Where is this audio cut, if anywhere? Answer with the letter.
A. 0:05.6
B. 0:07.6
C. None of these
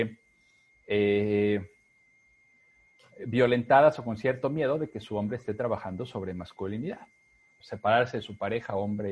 B